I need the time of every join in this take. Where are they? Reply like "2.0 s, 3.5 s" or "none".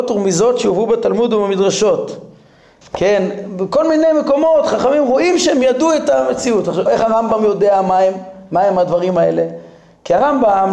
2.8 s, 6.9 s